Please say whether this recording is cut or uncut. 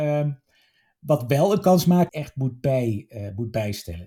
cut